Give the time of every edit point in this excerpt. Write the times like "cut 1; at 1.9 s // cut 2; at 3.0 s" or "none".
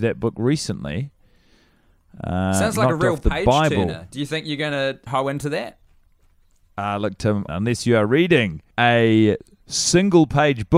cut 1; at 5.1 s // cut 2; at 7.5 s // cut 3; at 8.7 s